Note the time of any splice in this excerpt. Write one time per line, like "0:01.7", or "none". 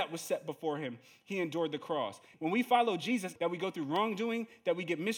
0:02.3
0:03.4